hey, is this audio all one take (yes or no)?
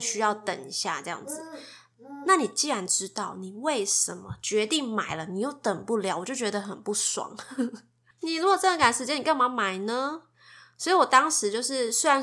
yes